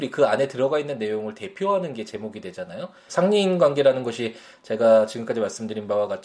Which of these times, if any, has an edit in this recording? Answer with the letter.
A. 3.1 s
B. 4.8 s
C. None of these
A